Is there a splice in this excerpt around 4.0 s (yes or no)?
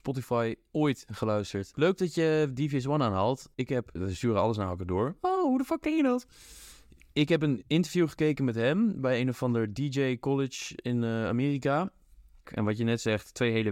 yes